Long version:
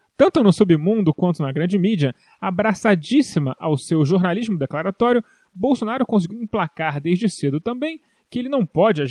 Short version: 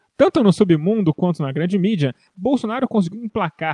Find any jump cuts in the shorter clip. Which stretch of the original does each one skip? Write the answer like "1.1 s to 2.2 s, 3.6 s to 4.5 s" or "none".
2.3 s to 5.5 s